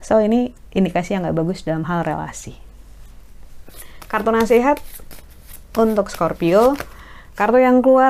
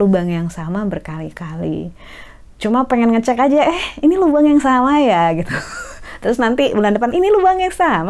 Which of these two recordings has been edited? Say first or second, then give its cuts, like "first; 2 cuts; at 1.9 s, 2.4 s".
second; 1 cut; at 7.1 s